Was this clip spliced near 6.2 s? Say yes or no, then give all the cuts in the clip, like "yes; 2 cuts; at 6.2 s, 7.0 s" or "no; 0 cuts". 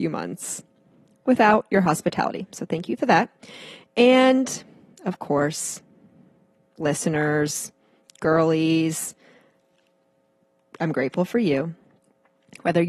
no; 0 cuts